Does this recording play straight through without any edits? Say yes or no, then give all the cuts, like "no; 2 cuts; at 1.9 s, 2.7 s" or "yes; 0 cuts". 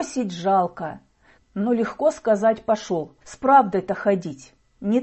no; 2 cuts; at 1.4 s, 3.2 s